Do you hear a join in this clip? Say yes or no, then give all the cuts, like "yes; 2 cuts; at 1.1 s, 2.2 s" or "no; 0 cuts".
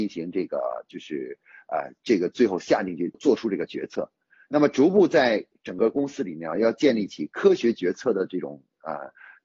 yes; 1 cut; at 3.1 s